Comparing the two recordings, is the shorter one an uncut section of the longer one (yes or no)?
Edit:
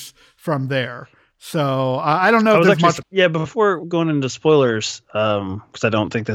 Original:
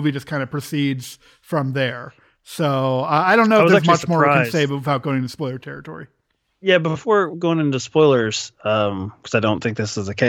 no